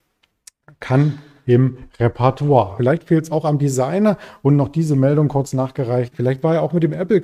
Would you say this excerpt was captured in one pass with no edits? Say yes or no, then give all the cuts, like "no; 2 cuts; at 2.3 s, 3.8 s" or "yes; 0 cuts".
no; 2 cuts; at 2.8 s, 6.1 s